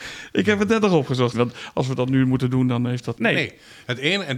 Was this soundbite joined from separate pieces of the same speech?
yes; 2 cuts; at 1.3 s, 3.1 s

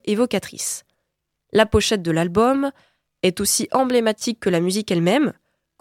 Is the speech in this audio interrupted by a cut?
no; 0 cuts

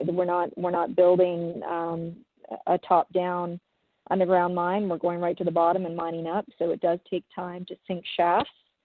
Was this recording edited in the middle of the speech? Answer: no; 0 cuts

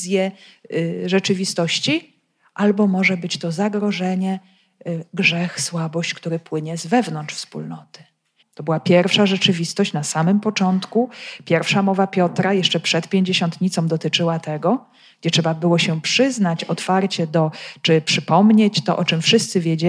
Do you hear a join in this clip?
yes; 1 cut; at 8.4 s

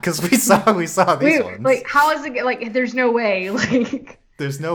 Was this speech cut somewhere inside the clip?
no; 0 cuts

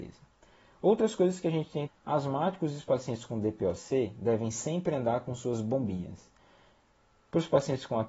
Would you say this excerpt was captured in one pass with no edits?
no; 1 cut; at 1.9 s

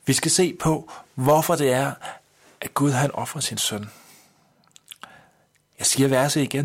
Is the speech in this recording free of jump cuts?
yes; 0 cuts

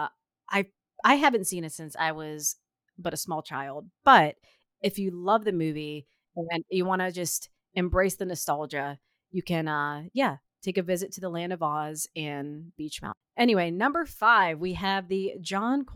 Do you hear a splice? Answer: no; 0 cuts

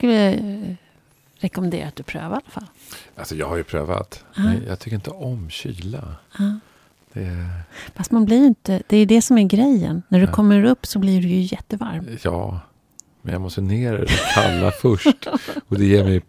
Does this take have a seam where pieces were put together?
no; 0 cuts

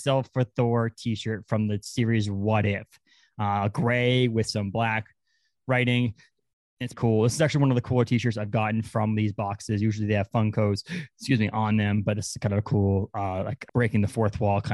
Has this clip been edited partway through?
yes; 2 cuts; at 6.9 s, 13.7 s

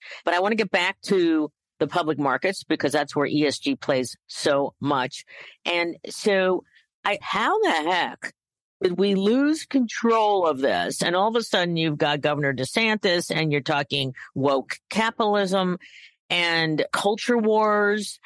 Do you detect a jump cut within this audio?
yes; 2 cuts; at 7.2 s, 16.9 s

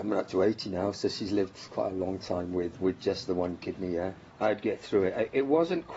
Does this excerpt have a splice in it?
yes; 2 cuts; at 2.7 s, 4.3 s

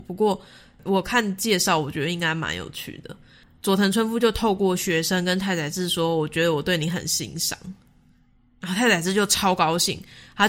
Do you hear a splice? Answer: no; 0 cuts

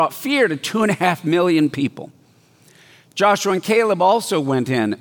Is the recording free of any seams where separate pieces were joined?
yes; 0 cuts

